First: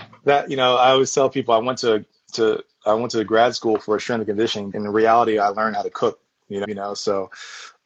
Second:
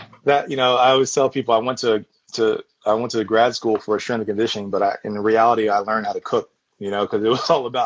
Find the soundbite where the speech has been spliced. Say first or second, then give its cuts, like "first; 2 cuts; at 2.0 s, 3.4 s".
first; 2 cuts; at 4.7 s, 6.6 s